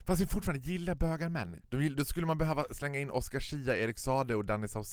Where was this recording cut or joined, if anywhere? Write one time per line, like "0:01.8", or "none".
0:01.6